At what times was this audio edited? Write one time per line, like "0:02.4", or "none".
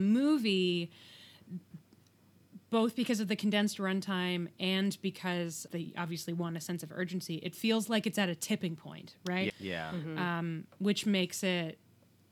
0:05.7
0:09.5